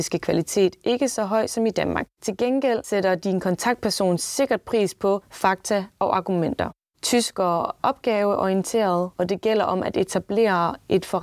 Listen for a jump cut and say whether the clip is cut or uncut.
cut